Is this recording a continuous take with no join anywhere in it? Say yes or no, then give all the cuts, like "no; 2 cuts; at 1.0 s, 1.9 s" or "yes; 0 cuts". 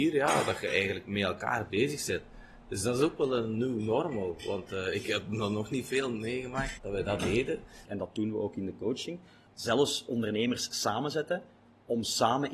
no; 3 cuts; at 6.8 s, 7.9 s, 9.5 s